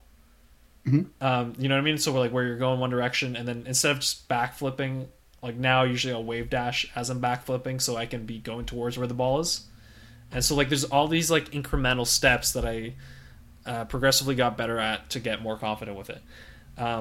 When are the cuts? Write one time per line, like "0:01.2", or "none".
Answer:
none

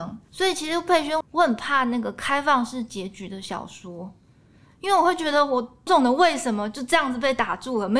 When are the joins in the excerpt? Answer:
0:01.2
0:05.9

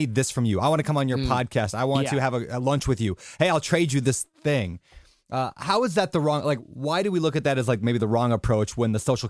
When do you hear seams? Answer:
none

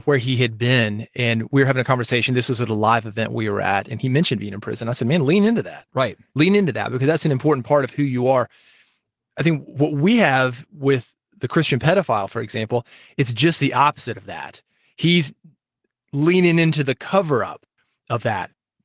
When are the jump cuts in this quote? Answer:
none

